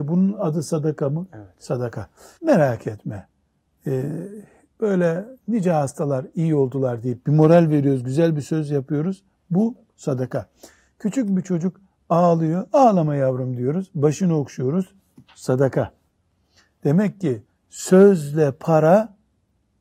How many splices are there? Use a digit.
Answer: 1